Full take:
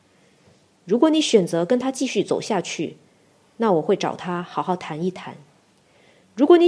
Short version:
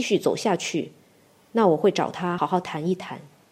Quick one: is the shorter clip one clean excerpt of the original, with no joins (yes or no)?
no